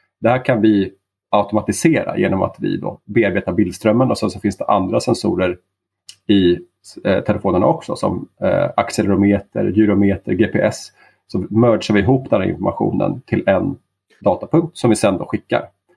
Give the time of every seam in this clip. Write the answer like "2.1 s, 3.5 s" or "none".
none